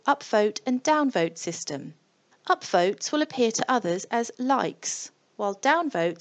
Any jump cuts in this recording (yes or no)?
yes